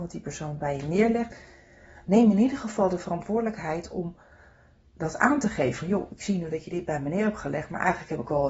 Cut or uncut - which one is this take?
uncut